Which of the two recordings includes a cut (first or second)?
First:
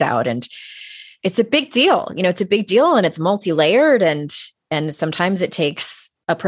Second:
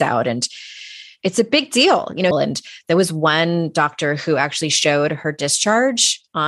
second